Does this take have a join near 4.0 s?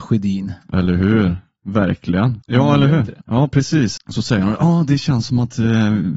yes; 2 cuts; at 2.4 s, 4.0 s

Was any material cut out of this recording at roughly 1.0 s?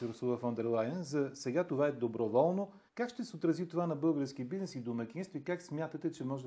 no; 1 cut; at 2.9 s

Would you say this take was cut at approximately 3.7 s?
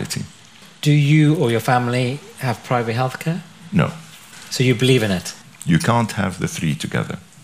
no; 1 cut; at 5.4 s

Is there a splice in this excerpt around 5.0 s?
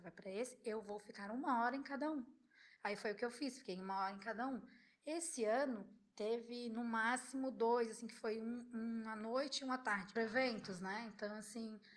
no; 1 cut; at 10.2 s

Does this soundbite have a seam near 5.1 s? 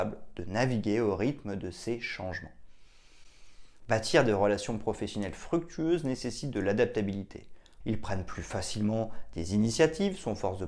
no; 2 cuts; at 3.8 s, 7.8 s

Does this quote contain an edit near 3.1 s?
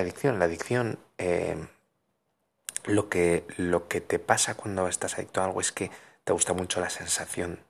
no; 0 cuts

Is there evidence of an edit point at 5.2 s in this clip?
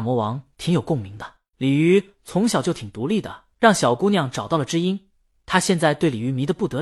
no; 2 cuts; at 1.5 s, 3.5 s

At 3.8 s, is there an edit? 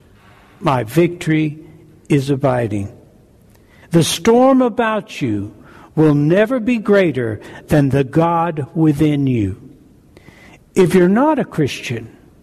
yes; 1 cut; at 3.8 s

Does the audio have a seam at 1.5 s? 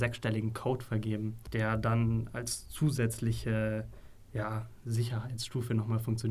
no; 0 cuts

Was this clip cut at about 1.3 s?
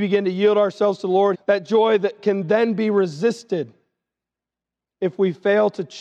yes; 1 cut; at 1.3 s

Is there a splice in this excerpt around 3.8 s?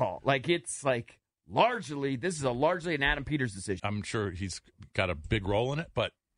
yes; 1 cut; at 3.8 s

